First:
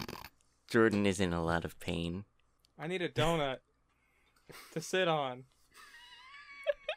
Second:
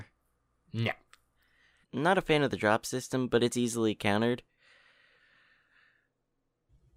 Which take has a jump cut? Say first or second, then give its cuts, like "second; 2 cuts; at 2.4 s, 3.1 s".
second; 1 cut; at 1.8 s